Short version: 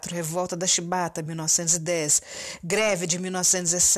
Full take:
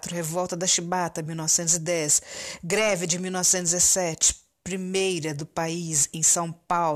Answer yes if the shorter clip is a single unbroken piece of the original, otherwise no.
yes